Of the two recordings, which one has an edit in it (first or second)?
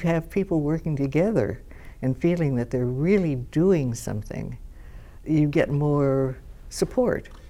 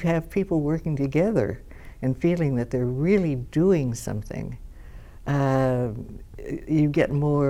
first